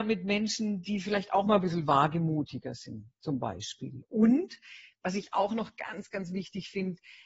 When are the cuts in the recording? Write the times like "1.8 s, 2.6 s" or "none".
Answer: none